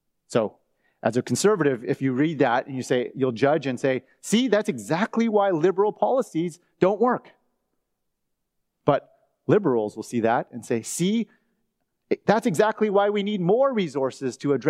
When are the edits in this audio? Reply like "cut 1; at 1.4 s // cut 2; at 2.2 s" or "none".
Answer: none